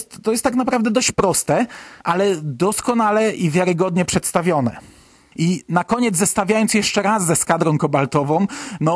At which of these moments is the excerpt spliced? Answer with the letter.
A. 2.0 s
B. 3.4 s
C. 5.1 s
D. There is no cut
A